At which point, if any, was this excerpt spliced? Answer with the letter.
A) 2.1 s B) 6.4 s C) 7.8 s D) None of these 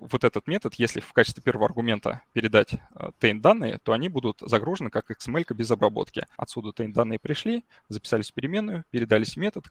B